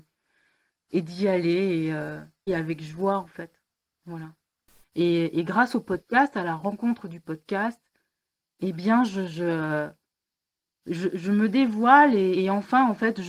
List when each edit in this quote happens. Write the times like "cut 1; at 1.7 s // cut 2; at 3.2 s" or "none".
cut 1; at 2.5 s // cut 2; at 4.8 s // cut 3; at 12.3 s